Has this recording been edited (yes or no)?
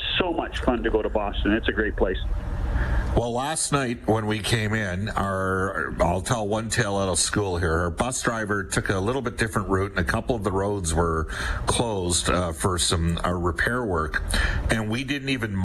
no